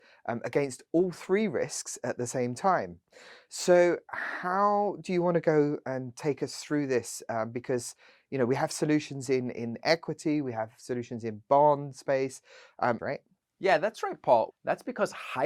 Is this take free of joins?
no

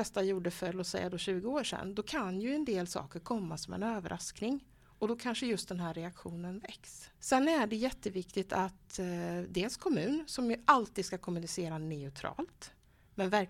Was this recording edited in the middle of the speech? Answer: yes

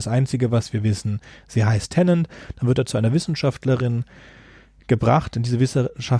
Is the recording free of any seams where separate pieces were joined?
yes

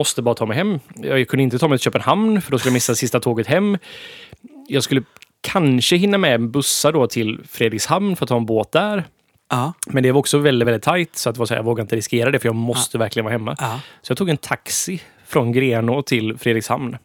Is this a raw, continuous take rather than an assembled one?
yes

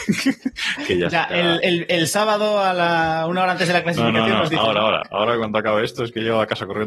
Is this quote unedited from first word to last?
yes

